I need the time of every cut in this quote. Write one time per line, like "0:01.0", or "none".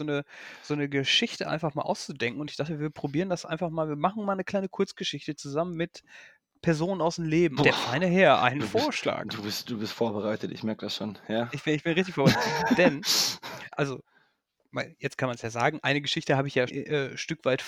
0:07.6
0:13.7
0:16.7